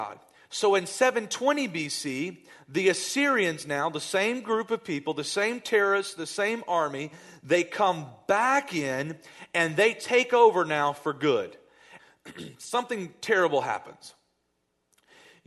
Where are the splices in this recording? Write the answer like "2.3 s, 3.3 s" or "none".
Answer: 12.0 s